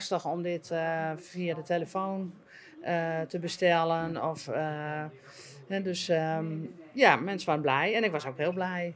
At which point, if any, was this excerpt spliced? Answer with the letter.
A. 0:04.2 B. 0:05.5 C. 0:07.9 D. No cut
D